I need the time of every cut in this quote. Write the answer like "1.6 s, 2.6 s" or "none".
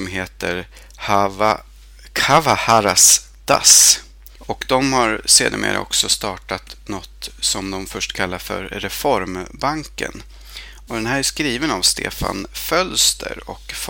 4.4 s, 10.9 s